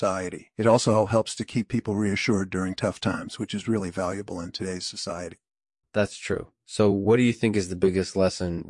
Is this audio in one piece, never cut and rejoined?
yes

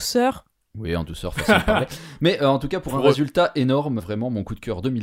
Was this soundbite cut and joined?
yes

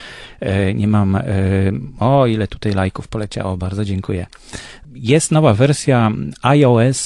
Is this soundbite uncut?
no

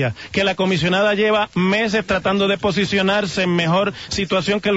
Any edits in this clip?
no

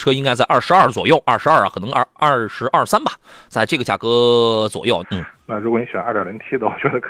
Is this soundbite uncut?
no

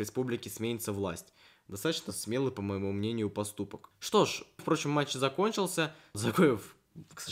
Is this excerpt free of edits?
no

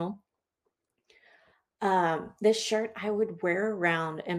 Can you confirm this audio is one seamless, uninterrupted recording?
yes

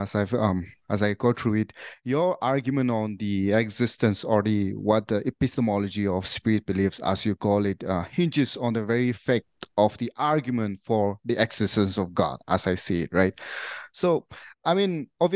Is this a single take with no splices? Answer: yes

